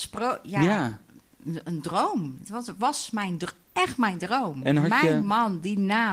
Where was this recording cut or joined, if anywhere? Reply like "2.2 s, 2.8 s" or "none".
3.6 s